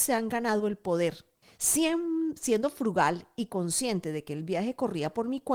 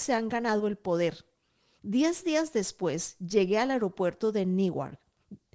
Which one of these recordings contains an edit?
first; 1 cut; at 1.4 s

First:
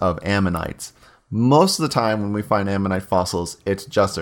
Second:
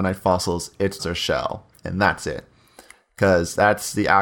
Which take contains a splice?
second; 1 cut; at 1.0 s

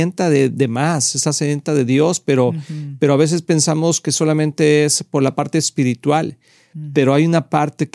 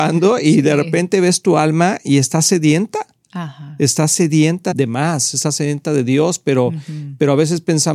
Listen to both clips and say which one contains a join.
second; 1 cut; at 4.7 s

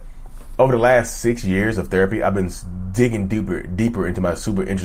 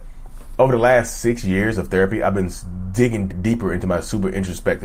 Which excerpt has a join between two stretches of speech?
second; 1 cut; at 3.3 s

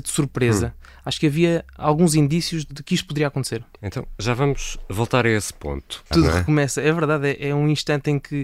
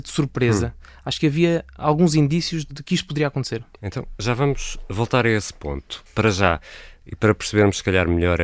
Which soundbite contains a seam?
first; 1 cut; at 6.1 s

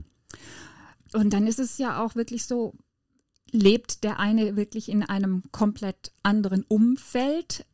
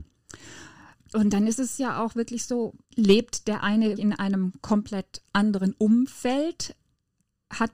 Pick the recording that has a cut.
second; 2 cuts; at 2.8 s, 4.0 s

